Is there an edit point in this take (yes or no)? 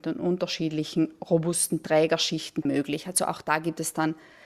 yes